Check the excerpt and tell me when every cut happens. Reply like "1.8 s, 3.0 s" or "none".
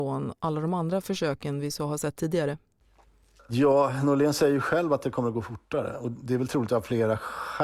none